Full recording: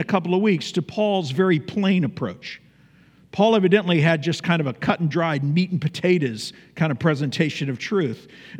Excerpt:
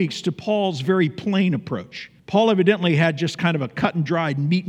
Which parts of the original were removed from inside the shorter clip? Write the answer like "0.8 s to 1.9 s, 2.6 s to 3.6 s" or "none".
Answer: 2.7 s to 3.2 s